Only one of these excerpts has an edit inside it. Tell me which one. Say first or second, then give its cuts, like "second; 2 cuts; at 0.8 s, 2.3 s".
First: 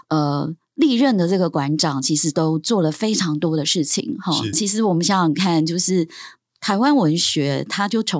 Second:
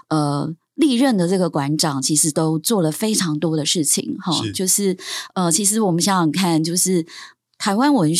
first; 1 cut; at 4.5 s